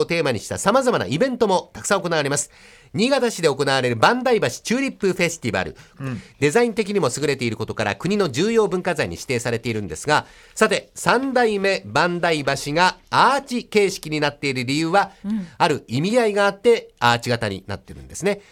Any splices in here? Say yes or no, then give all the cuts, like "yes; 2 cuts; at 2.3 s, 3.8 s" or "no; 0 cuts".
yes; 2 cuts; at 5.9 s, 15.2 s